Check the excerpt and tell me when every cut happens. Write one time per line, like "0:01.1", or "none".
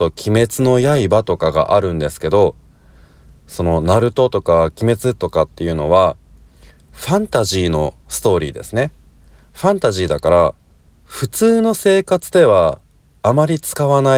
none